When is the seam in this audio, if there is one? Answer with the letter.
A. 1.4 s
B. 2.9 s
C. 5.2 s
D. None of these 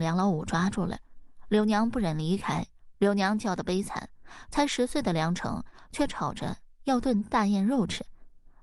B